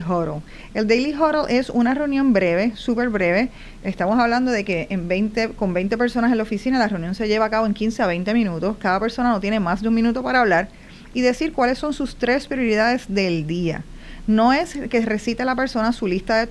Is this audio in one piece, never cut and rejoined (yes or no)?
yes